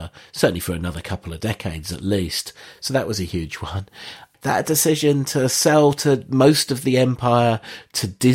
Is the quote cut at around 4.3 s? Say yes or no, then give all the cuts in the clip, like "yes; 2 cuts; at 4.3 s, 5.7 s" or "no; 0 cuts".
yes; 1 cut; at 4.3 s